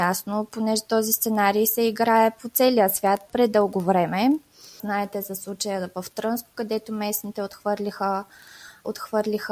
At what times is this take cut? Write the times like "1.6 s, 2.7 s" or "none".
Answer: 4.8 s